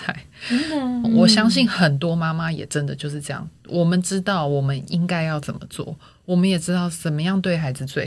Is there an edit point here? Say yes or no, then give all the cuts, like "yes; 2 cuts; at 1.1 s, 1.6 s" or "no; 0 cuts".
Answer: yes; 1 cut; at 1.0 s